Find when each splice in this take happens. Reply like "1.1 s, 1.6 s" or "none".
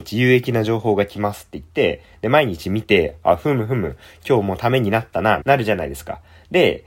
5.4 s